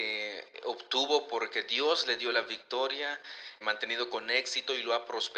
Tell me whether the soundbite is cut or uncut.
cut